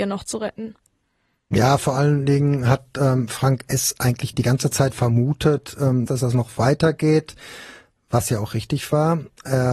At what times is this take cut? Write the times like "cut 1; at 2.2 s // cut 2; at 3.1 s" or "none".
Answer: cut 1; at 6.1 s